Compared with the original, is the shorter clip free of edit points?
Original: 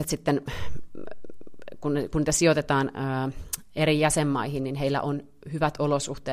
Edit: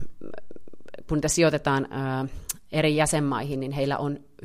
no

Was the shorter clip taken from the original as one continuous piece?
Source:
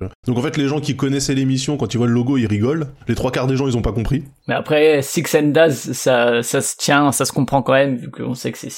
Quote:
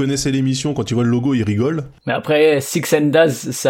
no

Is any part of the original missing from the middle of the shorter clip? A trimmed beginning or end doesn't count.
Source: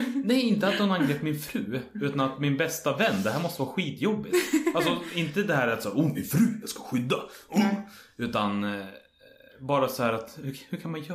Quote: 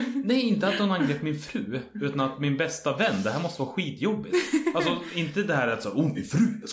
no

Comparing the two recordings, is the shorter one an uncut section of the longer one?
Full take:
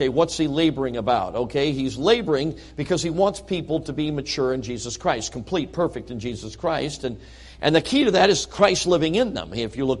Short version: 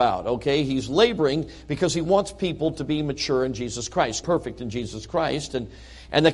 no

